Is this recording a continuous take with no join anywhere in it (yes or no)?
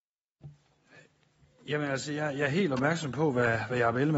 yes